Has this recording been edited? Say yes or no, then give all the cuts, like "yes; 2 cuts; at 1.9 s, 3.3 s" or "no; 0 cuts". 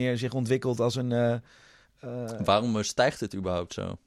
no; 0 cuts